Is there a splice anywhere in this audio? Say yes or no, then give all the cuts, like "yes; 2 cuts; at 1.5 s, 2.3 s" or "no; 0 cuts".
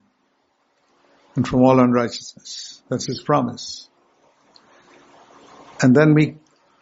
no; 0 cuts